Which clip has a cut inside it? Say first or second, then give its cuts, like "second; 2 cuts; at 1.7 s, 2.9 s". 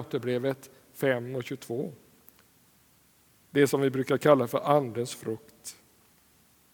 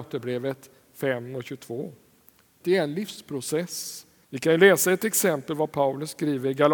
second; 2 cuts; at 2.6 s, 4.2 s